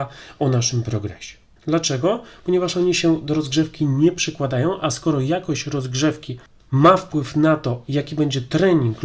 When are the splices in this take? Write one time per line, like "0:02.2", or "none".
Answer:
0:01.6